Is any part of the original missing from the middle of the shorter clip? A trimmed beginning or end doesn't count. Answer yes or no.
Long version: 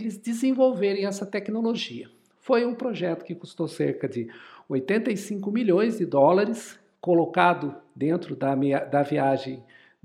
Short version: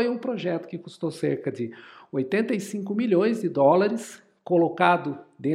no